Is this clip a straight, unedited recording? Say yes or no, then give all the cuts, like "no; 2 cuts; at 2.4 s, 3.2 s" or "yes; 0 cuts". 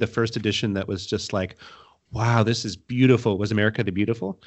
yes; 0 cuts